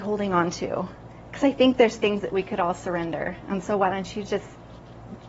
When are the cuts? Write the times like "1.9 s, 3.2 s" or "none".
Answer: none